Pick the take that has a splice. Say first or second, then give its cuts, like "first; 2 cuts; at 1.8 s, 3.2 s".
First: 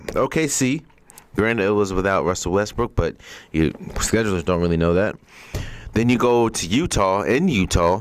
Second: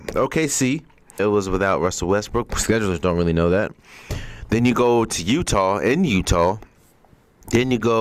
second; 2 cuts; at 1.2 s, 2.5 s